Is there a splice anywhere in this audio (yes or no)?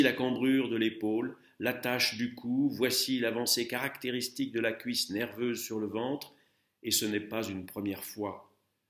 no